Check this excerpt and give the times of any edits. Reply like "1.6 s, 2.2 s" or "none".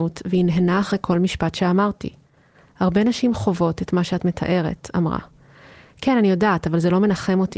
none